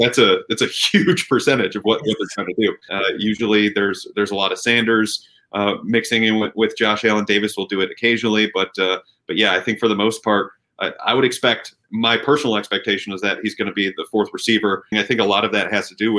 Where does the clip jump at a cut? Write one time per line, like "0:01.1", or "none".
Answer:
0:02.9
0:14.9